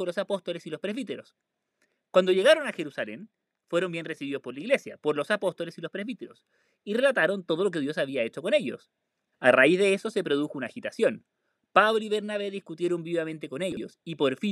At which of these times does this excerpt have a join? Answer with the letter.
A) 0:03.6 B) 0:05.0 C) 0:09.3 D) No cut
C